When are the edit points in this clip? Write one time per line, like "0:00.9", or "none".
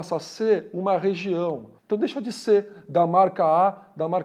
0:01.8